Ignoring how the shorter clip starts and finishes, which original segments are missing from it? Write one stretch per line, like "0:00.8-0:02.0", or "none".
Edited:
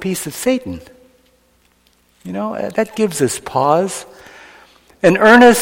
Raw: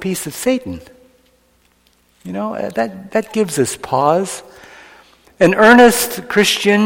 0:02.7-0:03.1